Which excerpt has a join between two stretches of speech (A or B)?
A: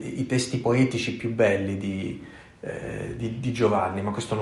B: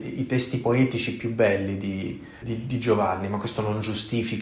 B